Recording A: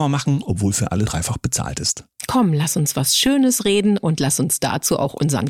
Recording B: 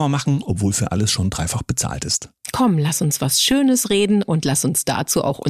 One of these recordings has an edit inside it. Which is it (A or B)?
A